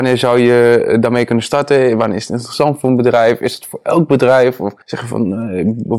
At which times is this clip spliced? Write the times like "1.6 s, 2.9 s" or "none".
4.8 s